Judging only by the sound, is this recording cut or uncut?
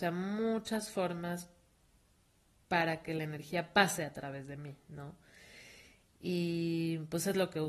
uncut